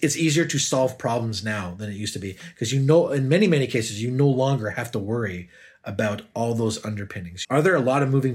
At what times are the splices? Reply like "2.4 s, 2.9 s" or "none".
7.4 s